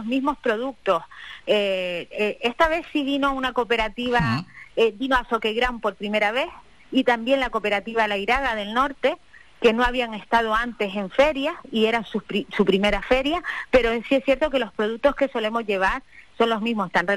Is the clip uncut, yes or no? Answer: yes